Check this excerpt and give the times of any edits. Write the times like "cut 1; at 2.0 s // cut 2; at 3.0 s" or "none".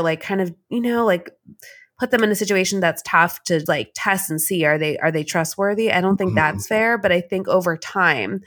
cut 1; at 3.7 s